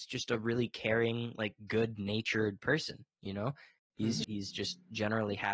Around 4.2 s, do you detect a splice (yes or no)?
yes